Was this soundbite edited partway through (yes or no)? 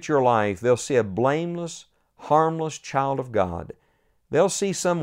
no